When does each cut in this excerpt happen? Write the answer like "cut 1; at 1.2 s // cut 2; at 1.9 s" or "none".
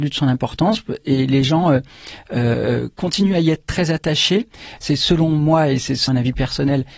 cut 1; at 4.8 s // cut 2; at 6.1 s